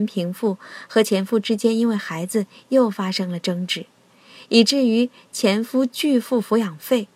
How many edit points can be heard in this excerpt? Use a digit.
0